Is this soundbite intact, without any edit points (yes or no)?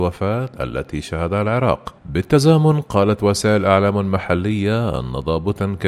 no